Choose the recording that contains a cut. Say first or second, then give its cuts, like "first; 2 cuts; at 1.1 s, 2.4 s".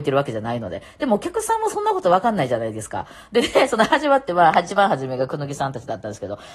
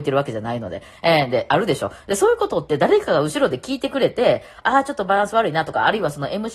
second; 1 cut; at 0.9 s